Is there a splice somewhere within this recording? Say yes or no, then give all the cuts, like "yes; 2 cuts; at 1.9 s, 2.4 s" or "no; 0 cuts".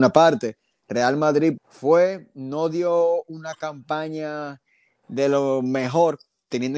yes; 1 cut; at 1.6 s